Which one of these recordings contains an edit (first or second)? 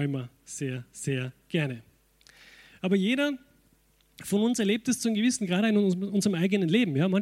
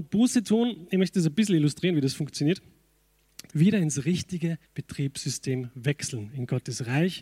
second